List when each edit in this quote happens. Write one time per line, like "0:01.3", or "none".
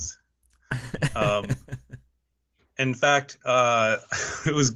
none